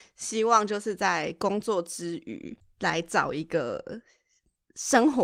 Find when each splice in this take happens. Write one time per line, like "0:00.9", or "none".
none